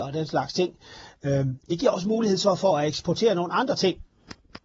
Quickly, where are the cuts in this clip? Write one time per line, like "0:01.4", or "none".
0:01.6

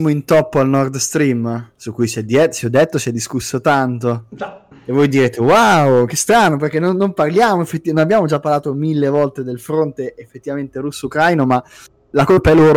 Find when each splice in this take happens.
none

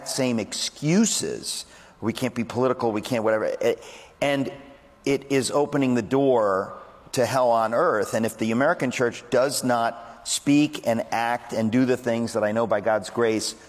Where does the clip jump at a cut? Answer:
none

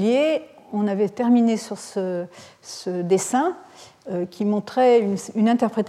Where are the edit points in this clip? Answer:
none

